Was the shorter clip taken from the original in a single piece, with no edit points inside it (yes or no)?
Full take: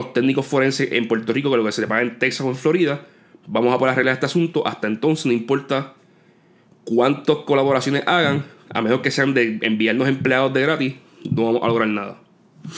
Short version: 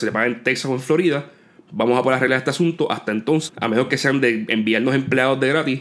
no